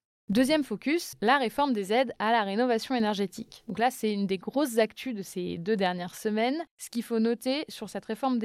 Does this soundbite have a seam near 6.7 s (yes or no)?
yes